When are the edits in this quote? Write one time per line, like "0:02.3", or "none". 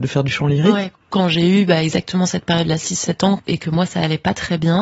0:01.0
0:03.4